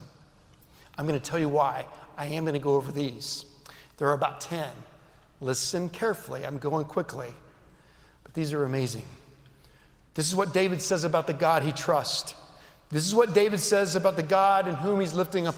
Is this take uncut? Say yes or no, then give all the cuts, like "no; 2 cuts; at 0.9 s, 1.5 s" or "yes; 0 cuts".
yes; 0 cuts